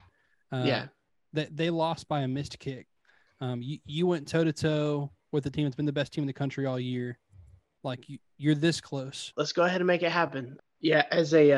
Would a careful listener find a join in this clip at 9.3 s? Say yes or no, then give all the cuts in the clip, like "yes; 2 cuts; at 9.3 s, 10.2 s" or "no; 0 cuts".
yes; 2 cuts; at 9.3 s, 10.6 s